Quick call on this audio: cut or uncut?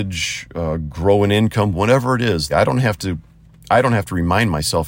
cut